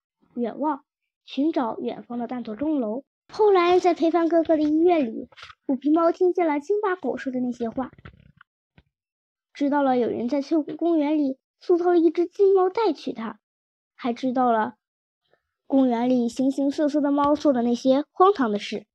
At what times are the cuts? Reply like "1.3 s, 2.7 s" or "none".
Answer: 3.3 s